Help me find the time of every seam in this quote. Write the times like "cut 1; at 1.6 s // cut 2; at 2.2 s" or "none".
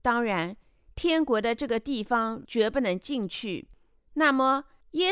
cut 1; at 2.4 s // cut 2; at 4.0 s

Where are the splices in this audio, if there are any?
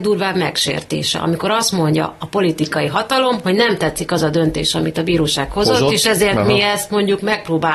none

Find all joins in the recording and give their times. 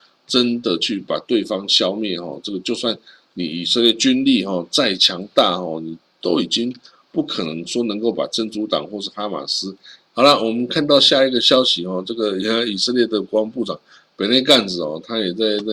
cut 1; at 10.1 s

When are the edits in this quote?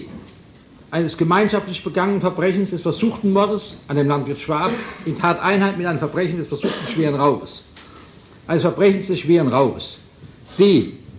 cut 1; at 8.5 s

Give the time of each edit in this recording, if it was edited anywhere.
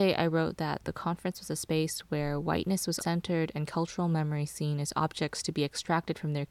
cut 1; at 3.0 s

